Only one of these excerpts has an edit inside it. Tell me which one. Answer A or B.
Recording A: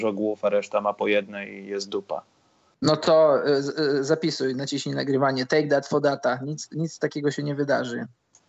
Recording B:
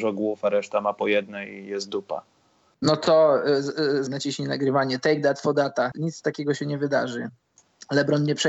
B